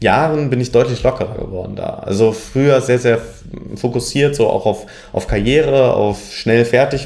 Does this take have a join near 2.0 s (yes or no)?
no